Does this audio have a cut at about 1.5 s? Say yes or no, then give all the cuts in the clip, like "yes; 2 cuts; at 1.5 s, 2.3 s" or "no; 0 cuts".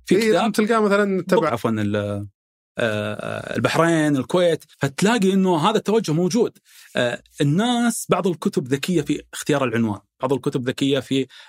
yes; 2 cuts; at 1.5 s, 4.7 s